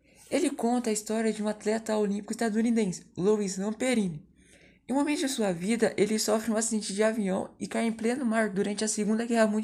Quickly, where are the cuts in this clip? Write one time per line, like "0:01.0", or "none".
none